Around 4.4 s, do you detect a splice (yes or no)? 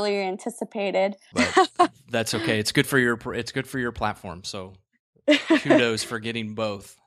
no